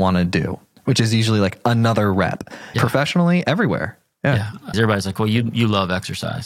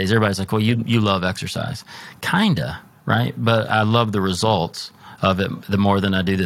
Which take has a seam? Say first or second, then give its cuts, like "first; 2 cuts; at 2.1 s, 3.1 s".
first; 2 cuts; at 2.7 s, 4.7 s